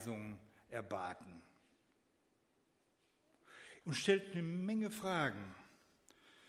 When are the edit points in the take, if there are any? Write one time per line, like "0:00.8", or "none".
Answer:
0:03.8